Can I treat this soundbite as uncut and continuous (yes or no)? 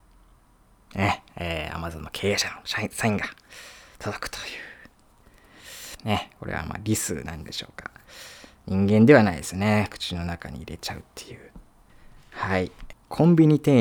no